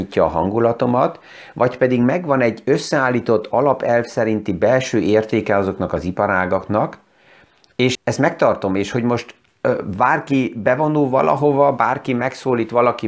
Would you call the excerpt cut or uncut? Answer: cut